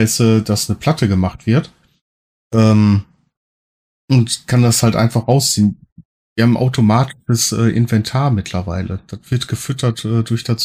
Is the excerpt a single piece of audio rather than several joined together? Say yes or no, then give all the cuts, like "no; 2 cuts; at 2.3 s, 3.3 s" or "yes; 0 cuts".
yes; 0 cuts